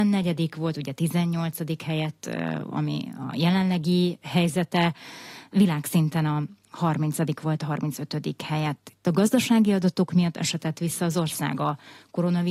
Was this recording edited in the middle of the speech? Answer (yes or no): no